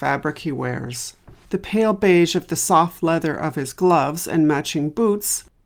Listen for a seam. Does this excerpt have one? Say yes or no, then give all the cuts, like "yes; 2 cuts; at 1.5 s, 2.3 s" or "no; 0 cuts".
yes; 1 cut; at 1.4 s